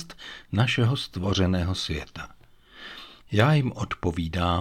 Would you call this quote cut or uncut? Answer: cut